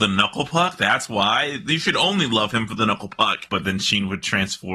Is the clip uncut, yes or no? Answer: no